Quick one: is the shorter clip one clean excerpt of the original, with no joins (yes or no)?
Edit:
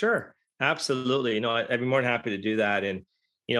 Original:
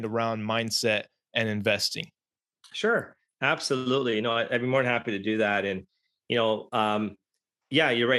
yes